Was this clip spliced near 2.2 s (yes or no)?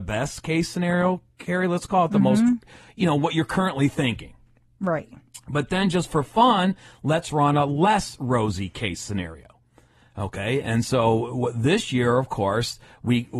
no